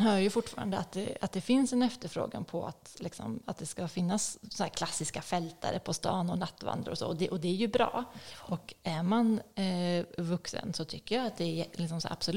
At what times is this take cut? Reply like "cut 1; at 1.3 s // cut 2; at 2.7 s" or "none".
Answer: none